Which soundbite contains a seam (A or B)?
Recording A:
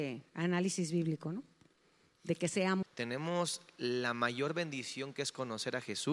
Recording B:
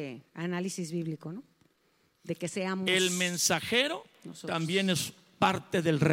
A